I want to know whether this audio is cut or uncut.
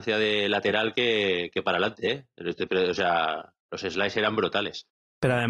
uncut